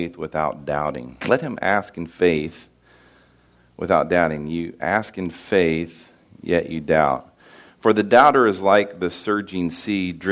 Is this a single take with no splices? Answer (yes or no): no